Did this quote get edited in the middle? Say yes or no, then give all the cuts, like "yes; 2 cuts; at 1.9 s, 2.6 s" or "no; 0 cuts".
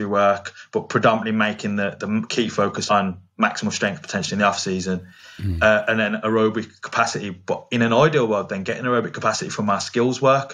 no; 0 cuts